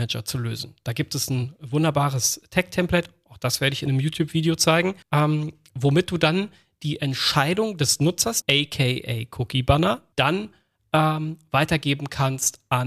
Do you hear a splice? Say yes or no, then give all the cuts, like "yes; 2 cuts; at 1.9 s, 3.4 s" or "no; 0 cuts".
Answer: yes; 3 cuts; at 5.0 s, 8.4 s, 10.1 s